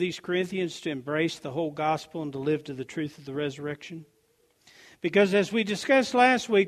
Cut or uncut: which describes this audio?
uncut